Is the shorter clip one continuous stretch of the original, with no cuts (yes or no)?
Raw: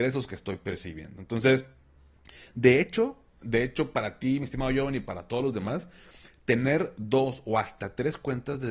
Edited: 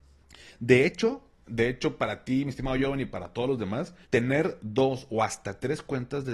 no